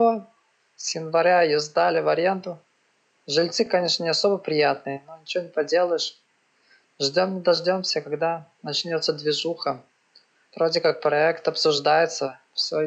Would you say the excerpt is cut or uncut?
uncut